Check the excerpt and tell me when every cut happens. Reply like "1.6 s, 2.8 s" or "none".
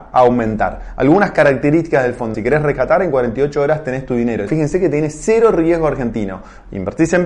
2.3 s, 4.5 s